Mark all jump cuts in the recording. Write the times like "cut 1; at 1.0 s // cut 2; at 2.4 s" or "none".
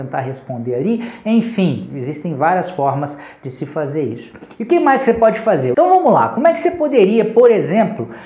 cut 1; at 5.7 s